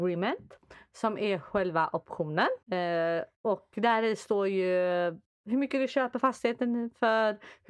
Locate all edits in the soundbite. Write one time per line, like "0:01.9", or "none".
0:02.6